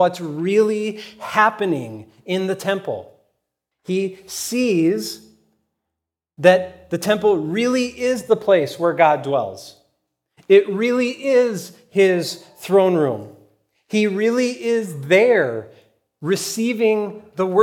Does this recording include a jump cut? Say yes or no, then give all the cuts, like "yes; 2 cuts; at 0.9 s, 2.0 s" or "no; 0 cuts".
yes; 1 cut; at 3.7 s